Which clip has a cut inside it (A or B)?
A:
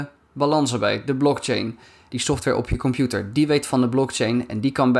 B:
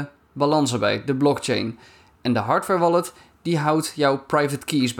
A